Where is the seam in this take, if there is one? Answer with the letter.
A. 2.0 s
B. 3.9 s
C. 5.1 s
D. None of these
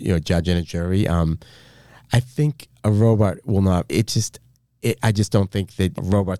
B